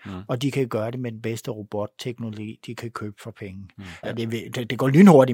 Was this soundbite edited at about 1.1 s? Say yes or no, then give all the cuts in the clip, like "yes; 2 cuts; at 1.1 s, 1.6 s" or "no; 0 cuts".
no; 1 cut; at 4.0 s